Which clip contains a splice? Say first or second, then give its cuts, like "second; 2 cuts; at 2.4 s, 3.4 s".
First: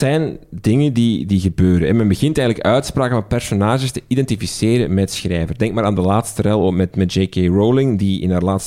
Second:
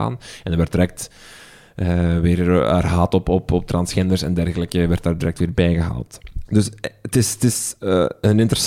second; 1 cut; at 6.5 s